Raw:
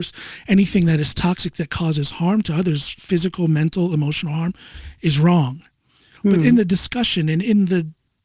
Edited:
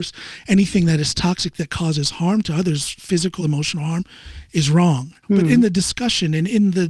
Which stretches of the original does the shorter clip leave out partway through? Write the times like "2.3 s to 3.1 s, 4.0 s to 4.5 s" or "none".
3.4 s to 3.9 s, 5.7 s to 6.2 s